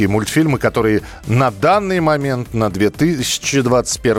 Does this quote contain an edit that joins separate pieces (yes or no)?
no